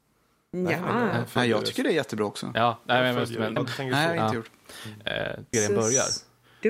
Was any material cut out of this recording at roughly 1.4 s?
no; 2 cuts; at 3.6 s, 5.5 s

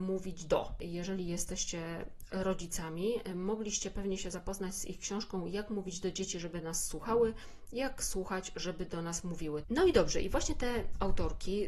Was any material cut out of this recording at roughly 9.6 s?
yes; 1 cut; at 9.6 s

